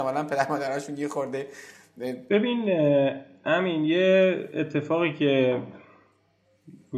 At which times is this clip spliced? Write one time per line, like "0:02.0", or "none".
0:02.3